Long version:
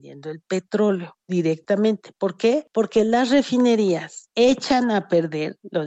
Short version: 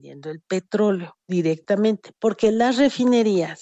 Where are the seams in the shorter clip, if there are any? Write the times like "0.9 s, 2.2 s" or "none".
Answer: 2.2 s